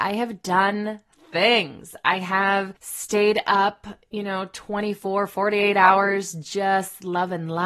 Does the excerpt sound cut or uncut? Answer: cut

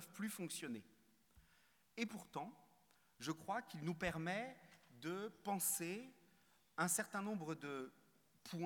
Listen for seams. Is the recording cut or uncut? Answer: uncut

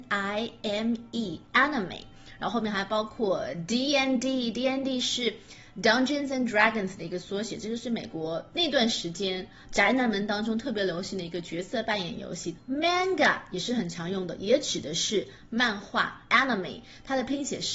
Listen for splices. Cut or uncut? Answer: cut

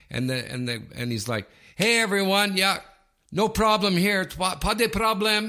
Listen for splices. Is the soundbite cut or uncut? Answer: uncut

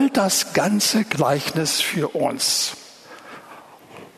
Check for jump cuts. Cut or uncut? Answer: uncut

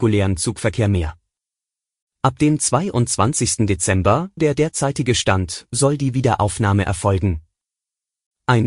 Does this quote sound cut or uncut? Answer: cut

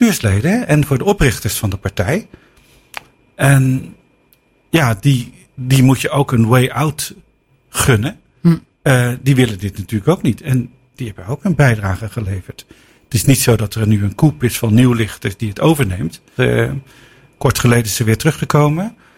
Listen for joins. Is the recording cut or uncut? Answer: cut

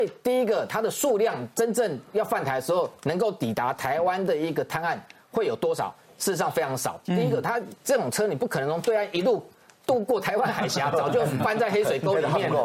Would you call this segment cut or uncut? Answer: uncut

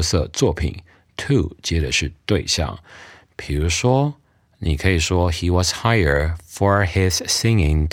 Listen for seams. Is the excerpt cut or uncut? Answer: uncut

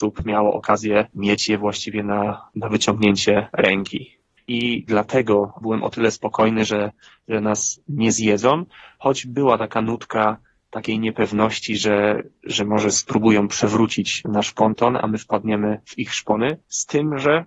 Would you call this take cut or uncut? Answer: cut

